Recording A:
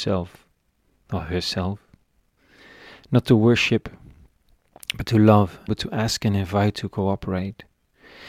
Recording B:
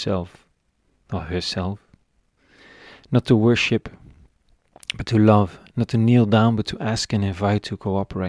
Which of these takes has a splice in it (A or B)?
A